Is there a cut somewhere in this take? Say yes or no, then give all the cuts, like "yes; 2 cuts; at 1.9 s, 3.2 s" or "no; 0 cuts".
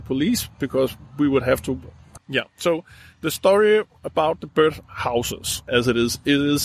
yes; 3 cuts; at 2.2 s, 4.5 s, 5.7 s